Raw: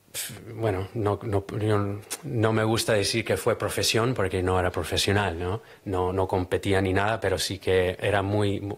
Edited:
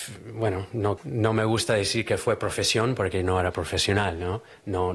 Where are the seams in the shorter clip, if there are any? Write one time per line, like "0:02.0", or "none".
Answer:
0:01.0